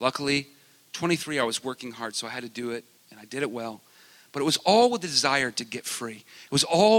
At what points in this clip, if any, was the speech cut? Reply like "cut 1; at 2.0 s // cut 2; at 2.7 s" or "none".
cut 1; at 3.0 s